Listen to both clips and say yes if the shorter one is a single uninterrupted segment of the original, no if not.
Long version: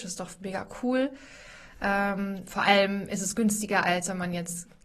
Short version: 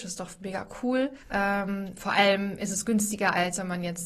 no